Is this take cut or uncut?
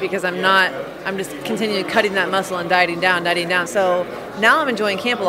cut